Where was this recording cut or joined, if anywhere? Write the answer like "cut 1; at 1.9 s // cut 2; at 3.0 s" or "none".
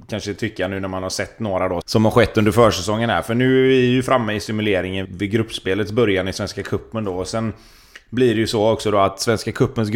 cut 1; at 1.8 s // cut 2; at 5.1 s